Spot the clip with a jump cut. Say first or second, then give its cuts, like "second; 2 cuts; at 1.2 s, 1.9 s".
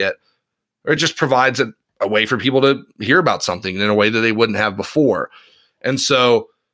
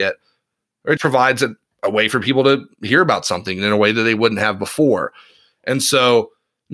second; 1 cut; at 1.0 s